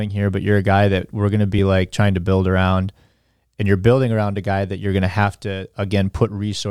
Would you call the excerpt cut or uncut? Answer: uncut